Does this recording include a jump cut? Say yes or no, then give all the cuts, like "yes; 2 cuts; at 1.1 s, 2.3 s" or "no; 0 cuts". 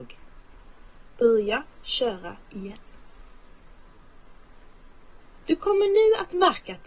no; 0 cuts